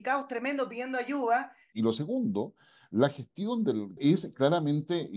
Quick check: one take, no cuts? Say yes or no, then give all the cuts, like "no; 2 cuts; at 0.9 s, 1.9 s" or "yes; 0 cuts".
no; 2 cuts; at 1.7 s, 4.0 s